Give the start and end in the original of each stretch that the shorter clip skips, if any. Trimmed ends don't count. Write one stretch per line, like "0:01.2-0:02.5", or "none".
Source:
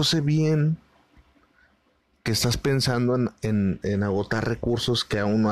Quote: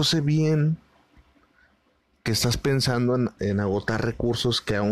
0:03.4-0:03.8